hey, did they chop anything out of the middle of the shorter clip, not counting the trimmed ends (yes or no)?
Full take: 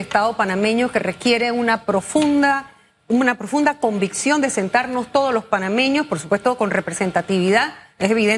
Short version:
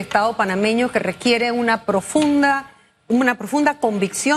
no